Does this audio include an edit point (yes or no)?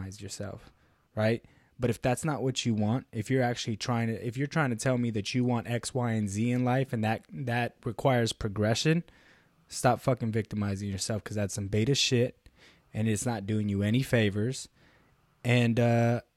no